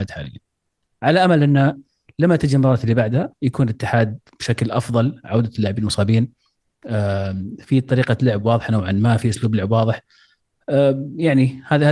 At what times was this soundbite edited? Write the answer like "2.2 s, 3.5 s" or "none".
1.0 s